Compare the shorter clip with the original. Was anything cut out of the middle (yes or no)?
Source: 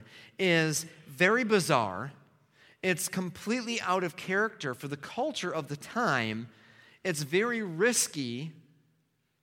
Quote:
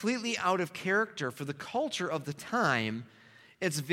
no